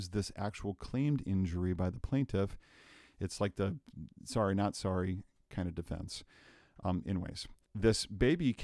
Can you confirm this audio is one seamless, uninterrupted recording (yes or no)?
no